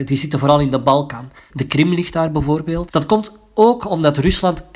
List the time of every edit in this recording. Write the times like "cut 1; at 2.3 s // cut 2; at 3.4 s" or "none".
cut 1; at 1.5 s // cut 2; at 2.9 s

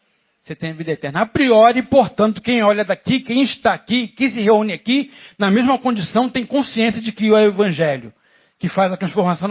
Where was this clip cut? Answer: none

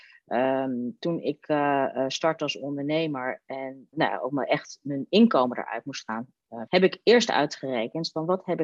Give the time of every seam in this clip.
cut 1; at 3.9 s // cut 2; at 6.7 s

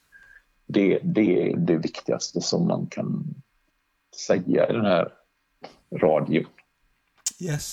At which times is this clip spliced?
cut 1; at 1.5 s

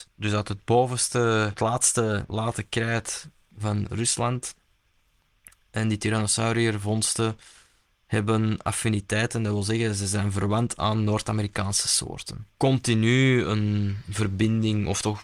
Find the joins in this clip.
cut 1; at 12.6 s

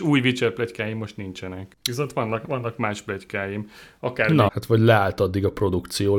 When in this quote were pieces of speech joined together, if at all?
cut 1; at 4.5 s

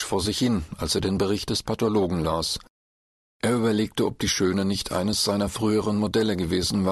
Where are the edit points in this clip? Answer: cut 1; at 3.2 s

